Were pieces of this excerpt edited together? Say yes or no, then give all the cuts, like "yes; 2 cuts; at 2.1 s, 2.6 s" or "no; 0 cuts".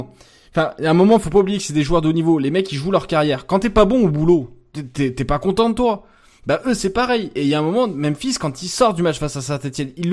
no; 0 cuts